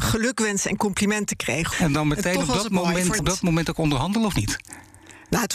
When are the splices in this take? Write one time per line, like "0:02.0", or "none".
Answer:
0:01.7
0:03.2